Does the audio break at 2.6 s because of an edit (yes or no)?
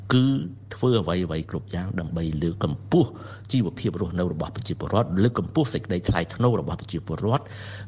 yes